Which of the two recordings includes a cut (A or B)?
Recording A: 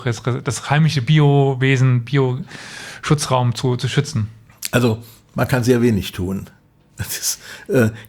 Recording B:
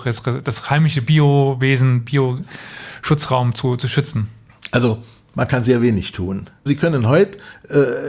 B